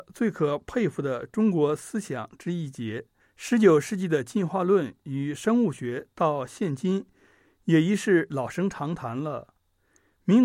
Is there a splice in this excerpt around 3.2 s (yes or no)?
yes